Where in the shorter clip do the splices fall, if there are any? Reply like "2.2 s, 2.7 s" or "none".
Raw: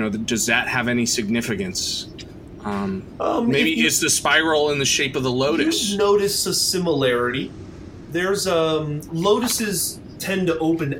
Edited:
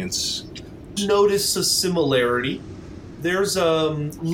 1.0 s